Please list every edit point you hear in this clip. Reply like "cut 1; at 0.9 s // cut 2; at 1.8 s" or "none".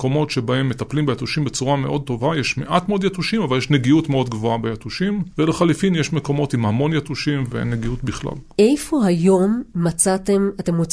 none